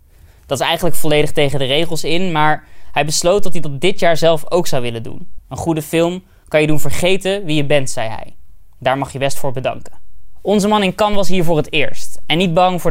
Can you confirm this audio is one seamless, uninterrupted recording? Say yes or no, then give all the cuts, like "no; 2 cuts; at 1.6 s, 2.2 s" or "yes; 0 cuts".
no; 1 cut; at 5.4 s